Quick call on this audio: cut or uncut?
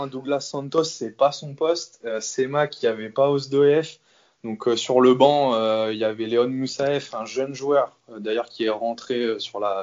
uncut